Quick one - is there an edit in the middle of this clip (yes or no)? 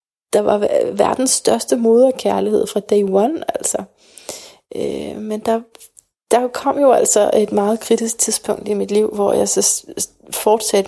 no